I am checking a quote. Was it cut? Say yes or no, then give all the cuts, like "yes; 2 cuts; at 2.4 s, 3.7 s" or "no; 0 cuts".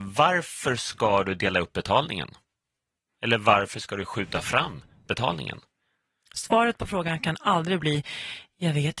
no; 0 cuts